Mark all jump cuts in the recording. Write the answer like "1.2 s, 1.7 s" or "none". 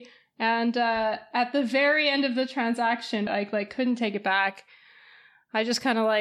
3.3 s